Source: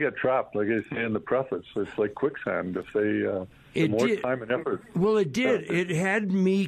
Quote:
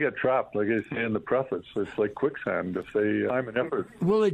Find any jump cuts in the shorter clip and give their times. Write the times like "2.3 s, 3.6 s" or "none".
3.3 s